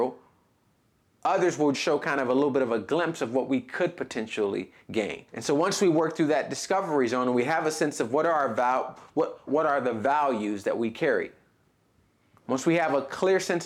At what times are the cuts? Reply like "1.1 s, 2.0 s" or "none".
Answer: 1.7 s, 5.3 s, 9.5 s

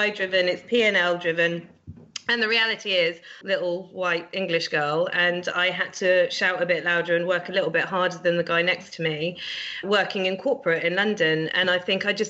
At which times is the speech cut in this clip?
3.4 s, 9.8 s

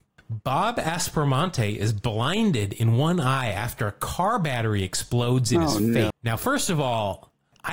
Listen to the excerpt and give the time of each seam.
6.1 s

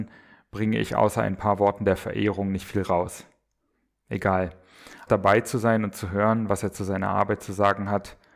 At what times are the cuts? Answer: 5.1 s

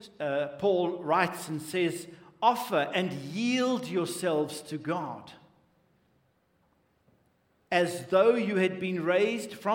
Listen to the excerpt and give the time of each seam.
none

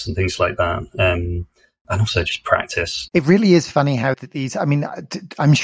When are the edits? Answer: 3.1 s, 4.1 s

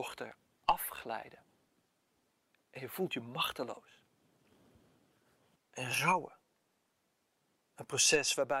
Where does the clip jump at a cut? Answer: 5.6 s

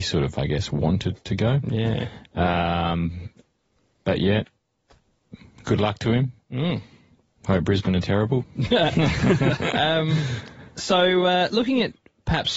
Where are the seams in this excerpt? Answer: none

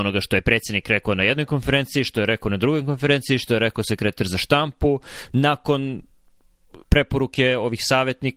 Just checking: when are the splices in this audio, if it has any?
5.3 s, 6.8 s

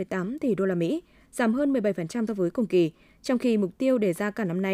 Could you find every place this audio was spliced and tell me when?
2.3 s

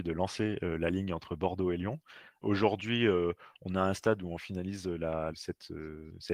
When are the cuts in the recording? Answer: 2.4 s, 5.3 s

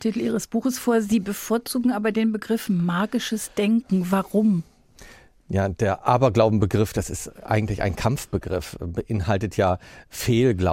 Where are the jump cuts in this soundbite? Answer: none

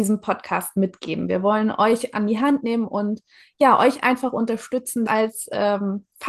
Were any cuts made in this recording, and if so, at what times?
5.1 s

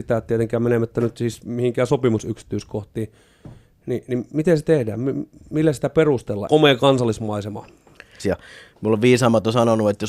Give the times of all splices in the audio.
6.5 s, 8.2 s

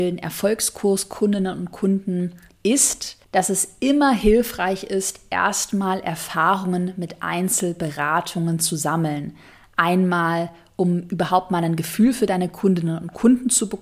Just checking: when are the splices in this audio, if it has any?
3.2 s

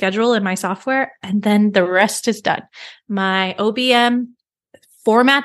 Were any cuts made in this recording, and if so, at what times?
none

